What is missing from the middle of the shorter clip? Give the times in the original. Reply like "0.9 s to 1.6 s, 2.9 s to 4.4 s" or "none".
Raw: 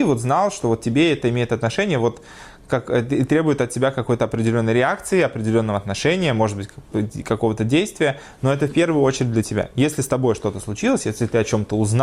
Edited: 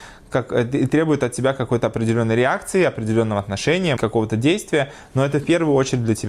6.3 s to 7.2 s